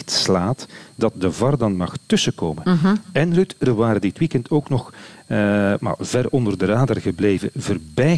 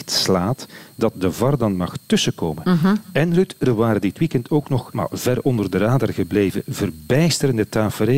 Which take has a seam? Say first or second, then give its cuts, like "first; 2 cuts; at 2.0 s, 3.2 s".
second; 1 cut; at 4.9 s